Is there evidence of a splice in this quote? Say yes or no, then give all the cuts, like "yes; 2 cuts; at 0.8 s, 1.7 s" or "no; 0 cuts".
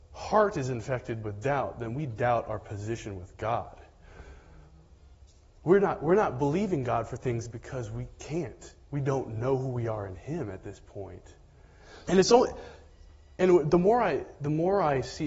yes; 2 cuts; at 8.8 s, 12.0 s